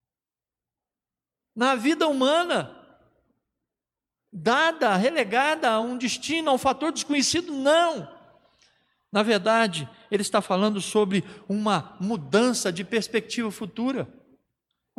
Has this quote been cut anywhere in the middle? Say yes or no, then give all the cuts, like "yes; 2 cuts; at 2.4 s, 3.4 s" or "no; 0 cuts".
no; 0 cuts